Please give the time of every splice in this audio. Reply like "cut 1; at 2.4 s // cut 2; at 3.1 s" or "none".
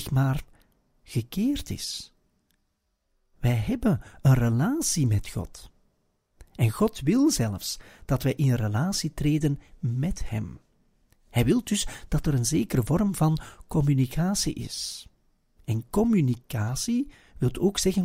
none